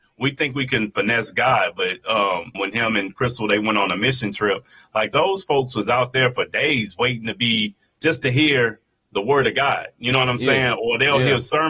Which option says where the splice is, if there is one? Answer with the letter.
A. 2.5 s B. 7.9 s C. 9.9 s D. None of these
A